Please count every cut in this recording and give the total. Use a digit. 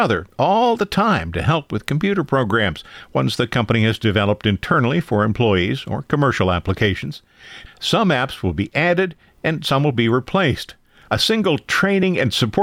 1